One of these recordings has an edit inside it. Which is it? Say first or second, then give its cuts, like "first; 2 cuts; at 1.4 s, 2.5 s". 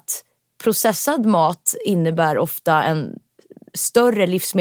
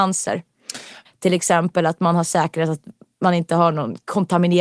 second; 1 cut; at 1.0 s